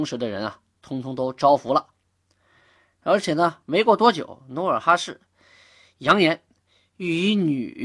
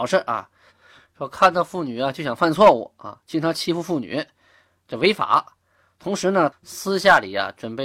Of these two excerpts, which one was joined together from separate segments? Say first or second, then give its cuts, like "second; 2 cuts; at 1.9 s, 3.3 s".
second; 1 cut; at 6.5 s